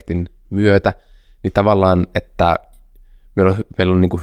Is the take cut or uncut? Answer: uncut